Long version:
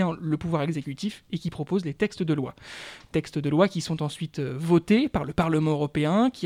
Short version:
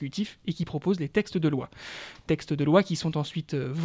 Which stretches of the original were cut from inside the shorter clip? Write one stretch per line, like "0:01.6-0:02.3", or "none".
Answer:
none